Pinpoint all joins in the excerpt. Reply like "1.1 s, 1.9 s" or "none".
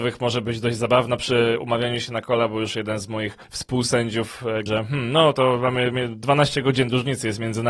3.4 s, 4.7 s